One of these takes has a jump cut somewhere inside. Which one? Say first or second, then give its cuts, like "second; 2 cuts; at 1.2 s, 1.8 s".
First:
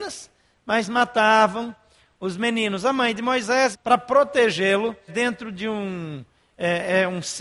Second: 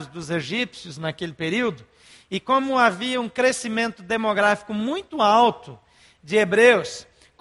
first; 2 cuts; at 3.7 s, 5.1 s